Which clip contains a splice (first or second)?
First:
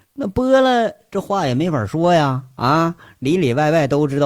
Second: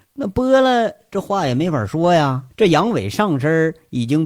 second